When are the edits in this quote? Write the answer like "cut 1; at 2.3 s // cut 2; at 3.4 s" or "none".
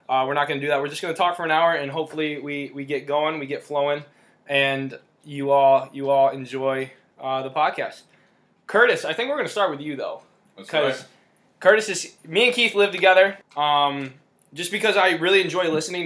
cut 1; at 13.4 s